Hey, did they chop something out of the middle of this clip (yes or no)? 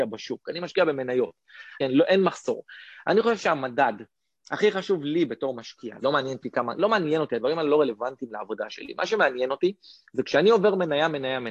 yes